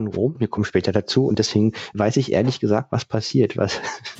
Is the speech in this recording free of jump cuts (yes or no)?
no